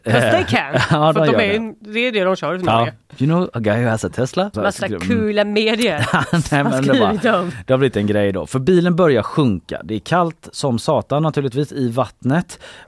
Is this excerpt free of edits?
no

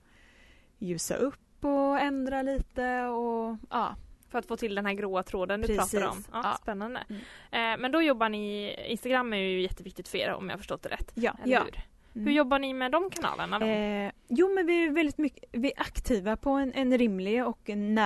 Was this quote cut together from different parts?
yes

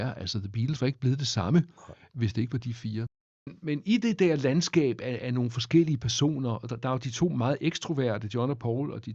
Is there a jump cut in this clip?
no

